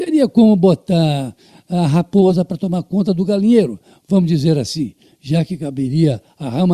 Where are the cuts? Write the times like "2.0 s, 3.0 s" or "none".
none